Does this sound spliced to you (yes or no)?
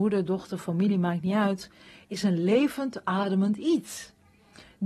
no